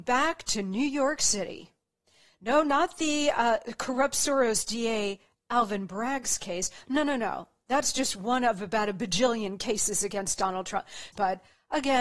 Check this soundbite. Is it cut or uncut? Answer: cut